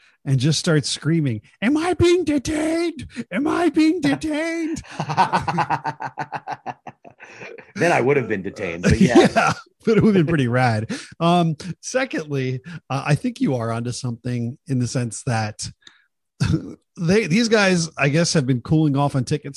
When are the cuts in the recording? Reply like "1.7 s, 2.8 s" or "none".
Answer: none